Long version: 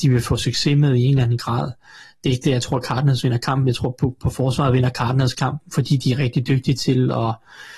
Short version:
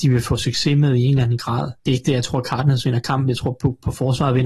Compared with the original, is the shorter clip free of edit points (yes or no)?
no